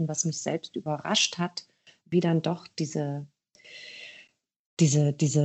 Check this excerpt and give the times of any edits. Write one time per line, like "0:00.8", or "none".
0:02.0